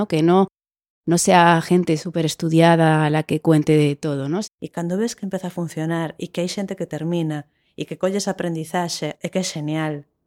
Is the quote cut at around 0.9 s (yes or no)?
no